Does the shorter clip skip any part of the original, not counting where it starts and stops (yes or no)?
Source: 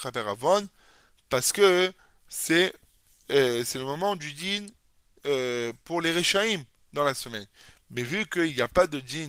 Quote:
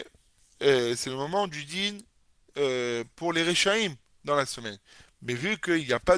no